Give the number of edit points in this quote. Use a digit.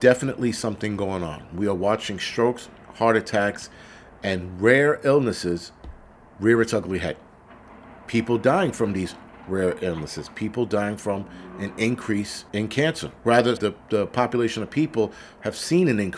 2